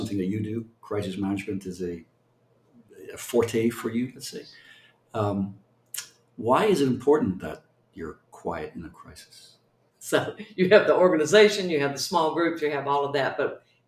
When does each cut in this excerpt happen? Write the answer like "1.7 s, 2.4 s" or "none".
9.9 s